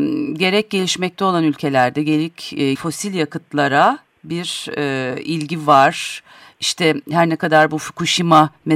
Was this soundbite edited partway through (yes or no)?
yes